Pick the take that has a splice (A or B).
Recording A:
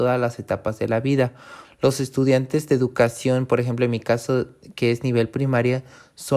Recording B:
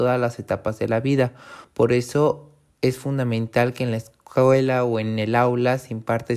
A